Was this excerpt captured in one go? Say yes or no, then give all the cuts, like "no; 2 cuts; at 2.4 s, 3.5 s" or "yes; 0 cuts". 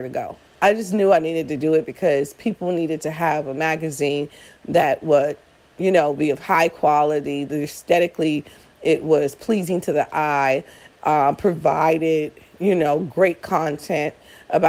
yes; 0 cuts